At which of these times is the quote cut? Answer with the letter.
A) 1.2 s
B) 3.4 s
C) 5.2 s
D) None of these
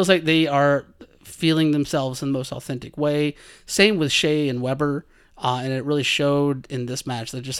D